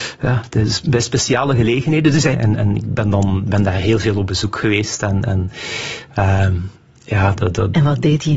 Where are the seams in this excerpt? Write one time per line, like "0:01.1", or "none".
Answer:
0:02.3